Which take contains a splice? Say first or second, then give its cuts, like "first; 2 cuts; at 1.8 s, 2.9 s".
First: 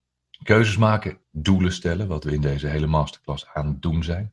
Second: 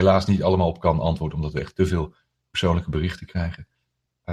first; 1 cut; at 1.2 s